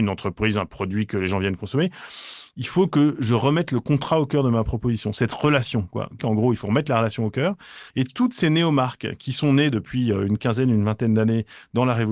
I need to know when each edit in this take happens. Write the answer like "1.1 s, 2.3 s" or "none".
6.2 s, 7.9 s